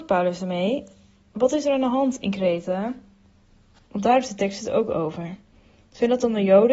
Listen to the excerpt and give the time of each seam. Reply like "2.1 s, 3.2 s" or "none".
3.9 s